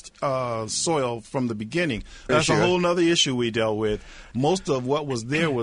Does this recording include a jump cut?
yes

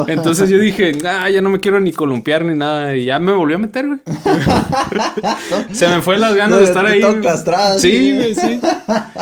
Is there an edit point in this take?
no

